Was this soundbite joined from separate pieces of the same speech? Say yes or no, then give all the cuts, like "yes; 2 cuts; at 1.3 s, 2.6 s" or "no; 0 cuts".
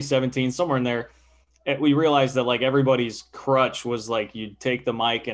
no; 0 cuts